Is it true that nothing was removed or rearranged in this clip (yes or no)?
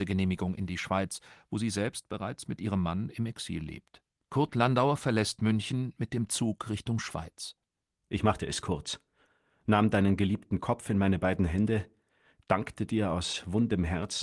no